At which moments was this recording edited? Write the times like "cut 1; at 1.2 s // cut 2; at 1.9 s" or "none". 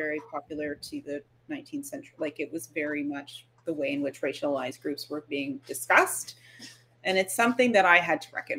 none